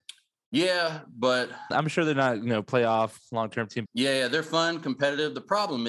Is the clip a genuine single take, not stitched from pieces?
no; 2 cuts; at 1.7 s, 3.9 s

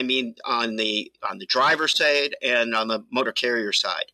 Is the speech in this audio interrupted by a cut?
yes; 1 cut; at 1.2 s

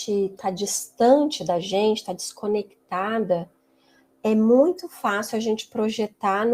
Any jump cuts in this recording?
no; 0 cuts

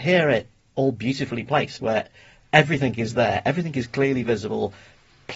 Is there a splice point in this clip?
no; 0 cuts

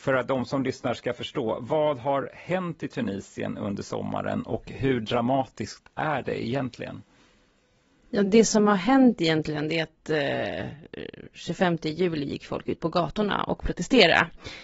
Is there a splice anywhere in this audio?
no; 0 cuts

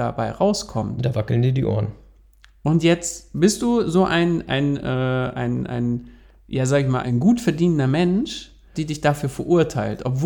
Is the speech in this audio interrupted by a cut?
yes; 2 cuts; at 7.0 s, 8.7 s

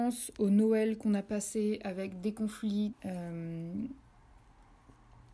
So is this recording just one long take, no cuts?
no; 1 cut; at 2.9 s

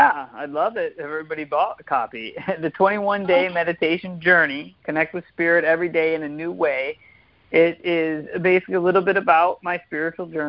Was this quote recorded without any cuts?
yes; 0 cuts

